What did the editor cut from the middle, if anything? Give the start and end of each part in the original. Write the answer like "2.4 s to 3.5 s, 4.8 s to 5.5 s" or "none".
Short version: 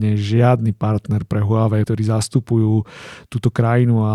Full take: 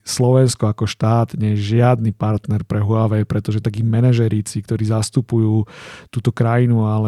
3.2 s to 4.7 s